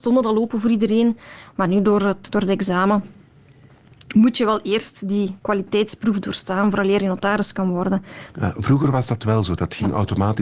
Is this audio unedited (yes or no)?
no